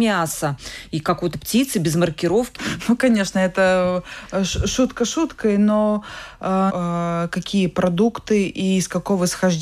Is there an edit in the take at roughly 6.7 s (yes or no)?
yes